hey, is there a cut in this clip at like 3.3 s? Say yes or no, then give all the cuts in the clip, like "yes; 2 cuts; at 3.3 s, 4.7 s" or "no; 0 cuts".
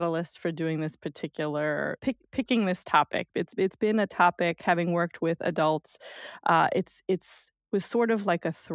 no; 1 cut; at 2.0 s